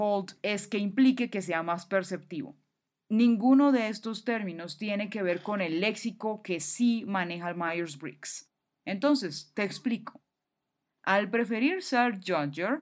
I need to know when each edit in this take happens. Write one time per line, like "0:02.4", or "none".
none